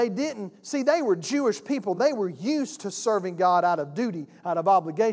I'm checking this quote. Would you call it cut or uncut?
uncut